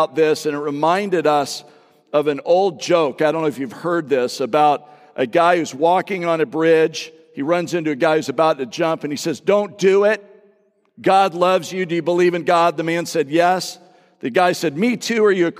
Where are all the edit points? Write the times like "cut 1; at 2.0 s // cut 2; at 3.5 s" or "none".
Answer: none

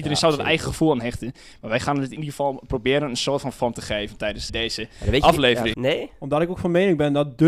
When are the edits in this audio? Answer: cut 1; at 4.5 s // cut 2; at 5.7 s

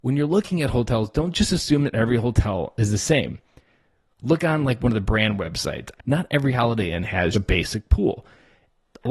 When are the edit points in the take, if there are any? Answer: cut 1; at 6.0 s // cut 2; at 7.3 s

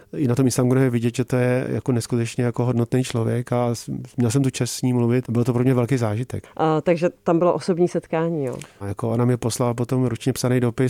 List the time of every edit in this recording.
cut 1; at 5.2 s // cut 2; at 6.4 s // cut 3; at 8.8 s

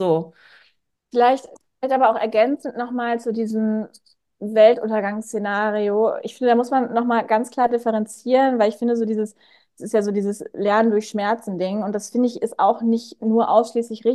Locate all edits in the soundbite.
none

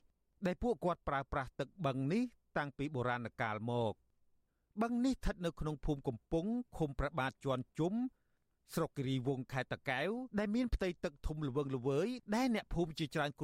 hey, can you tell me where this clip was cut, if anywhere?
cut 1; at 10.3 s

